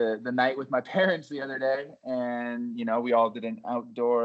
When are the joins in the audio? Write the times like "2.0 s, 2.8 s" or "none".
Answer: none